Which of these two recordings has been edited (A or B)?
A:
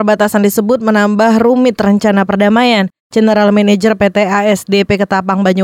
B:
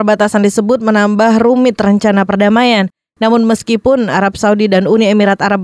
A